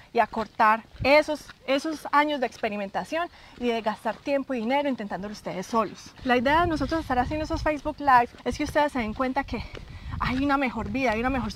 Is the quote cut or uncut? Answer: cut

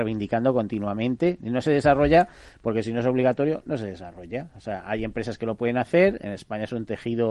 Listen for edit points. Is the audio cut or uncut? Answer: uncut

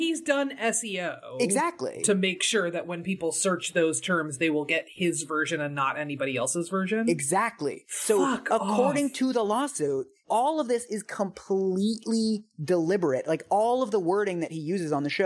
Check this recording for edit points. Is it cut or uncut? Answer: uncut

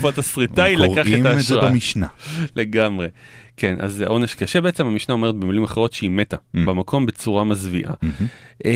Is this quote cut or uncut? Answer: uncut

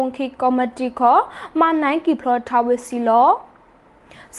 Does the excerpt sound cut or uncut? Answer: uncut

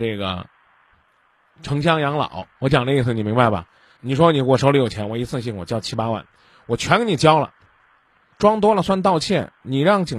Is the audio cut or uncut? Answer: cut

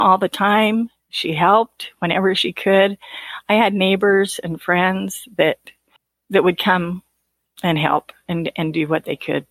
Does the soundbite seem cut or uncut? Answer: uncut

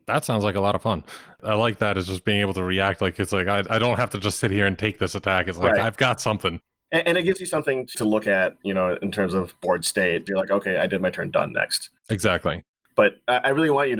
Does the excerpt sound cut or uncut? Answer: cut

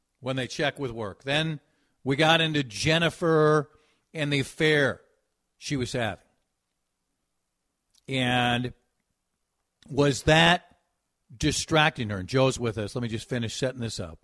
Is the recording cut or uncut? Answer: uncut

